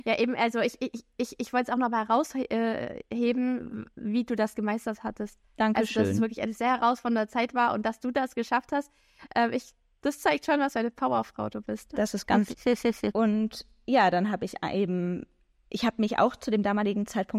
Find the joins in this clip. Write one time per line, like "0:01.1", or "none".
0:12.5